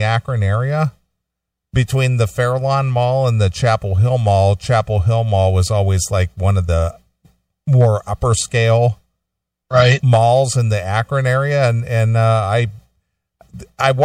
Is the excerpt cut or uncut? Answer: uncut